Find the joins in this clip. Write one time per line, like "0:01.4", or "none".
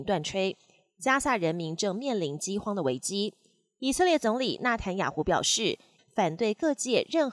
0:06.0